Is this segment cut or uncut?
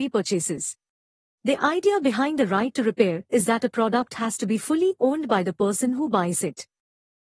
cut